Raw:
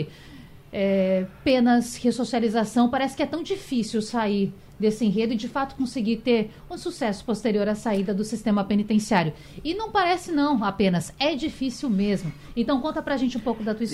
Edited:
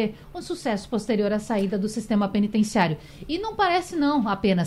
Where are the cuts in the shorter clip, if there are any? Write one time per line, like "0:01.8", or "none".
none

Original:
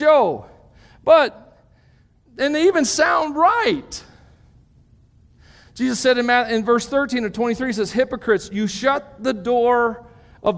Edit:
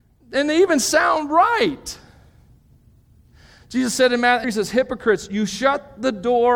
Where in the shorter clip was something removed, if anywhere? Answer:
0:04.4

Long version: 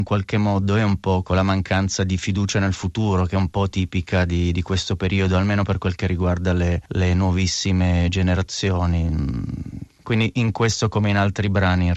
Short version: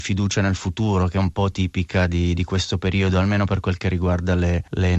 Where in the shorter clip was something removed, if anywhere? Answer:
none

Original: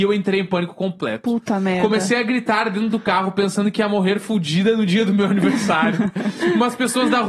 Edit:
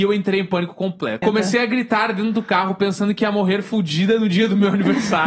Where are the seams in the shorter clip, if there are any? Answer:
0:01.2

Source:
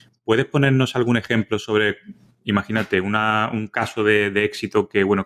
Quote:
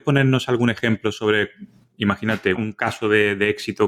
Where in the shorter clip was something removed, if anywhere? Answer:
0:02.5

